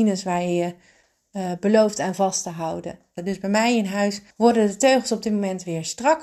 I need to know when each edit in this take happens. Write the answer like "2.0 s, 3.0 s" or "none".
3.2 s, 4.3 s